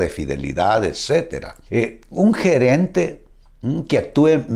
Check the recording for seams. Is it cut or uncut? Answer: cut